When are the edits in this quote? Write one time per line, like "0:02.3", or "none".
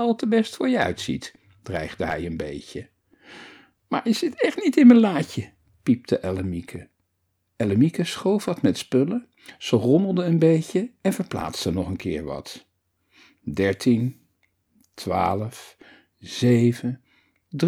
0:16.1